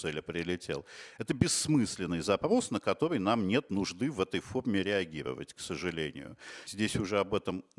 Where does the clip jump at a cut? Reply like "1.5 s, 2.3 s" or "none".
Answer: 6.7 s